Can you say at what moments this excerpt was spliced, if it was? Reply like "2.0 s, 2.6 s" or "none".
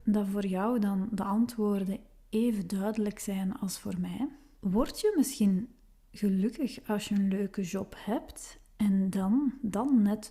4.6 s

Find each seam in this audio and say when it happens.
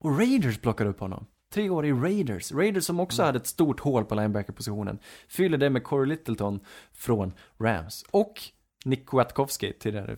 none

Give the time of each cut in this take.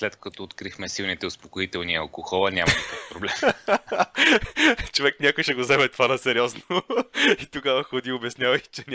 none

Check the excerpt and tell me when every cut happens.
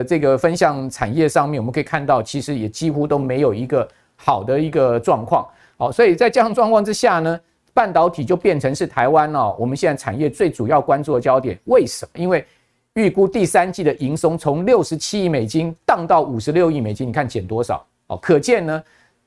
12.2 s

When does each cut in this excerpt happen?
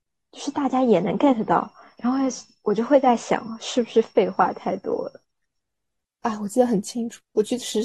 6.2 s

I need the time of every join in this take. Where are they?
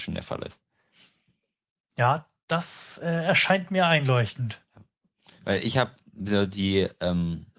none

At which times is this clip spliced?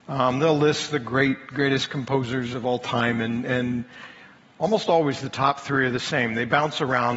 none

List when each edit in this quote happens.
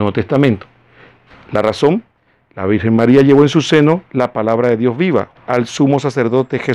1.3 s, 5.4 s

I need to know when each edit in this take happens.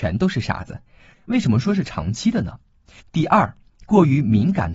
1.1 s, 3.0 s

